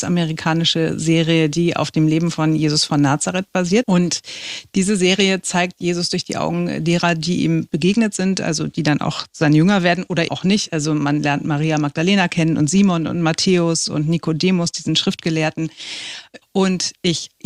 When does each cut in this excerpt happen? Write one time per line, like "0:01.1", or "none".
0:03.8
0:10.3
0:16.4